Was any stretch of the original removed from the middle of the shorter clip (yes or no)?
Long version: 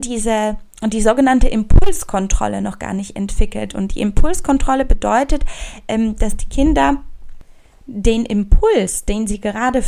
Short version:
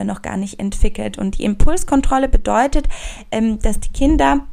no